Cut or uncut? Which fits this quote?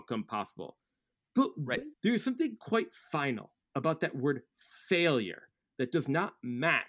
cut